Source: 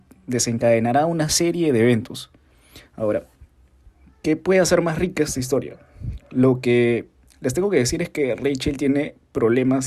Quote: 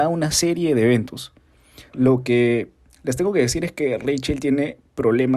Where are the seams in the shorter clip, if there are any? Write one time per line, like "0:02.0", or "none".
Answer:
0:01.9

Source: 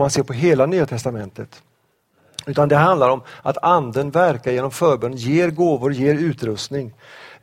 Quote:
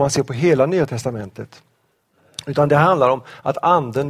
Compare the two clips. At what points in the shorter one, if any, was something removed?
none

